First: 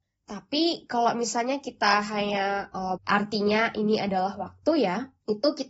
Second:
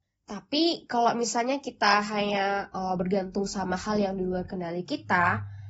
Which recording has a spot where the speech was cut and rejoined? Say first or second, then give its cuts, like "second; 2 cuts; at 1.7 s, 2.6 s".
first; 1 cut; at 3.0 s